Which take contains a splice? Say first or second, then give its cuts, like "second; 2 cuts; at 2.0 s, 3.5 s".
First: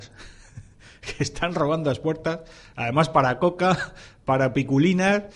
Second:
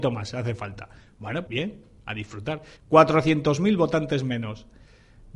second; 2 cuts; at 1.5 s, 2.8 s